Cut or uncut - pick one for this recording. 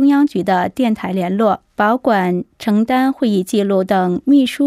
cut